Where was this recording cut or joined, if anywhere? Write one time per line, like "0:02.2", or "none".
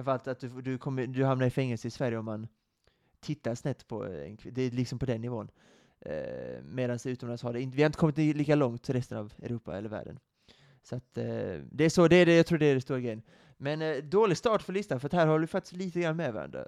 none